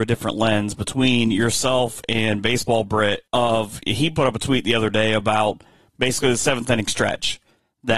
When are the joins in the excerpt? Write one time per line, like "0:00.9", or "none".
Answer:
0:03.3